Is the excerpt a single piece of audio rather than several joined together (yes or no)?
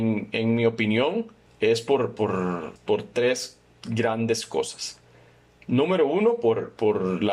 yes